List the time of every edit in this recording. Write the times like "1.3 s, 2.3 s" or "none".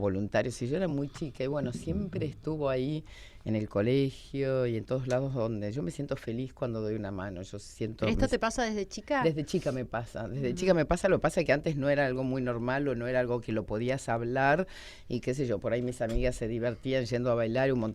none